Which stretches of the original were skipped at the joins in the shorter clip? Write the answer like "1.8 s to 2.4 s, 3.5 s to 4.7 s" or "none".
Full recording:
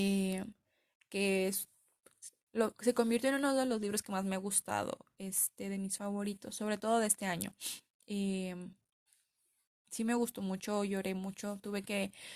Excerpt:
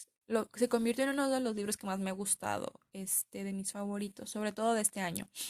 none